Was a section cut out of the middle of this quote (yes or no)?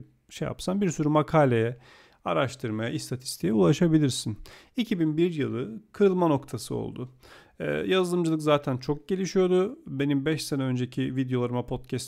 no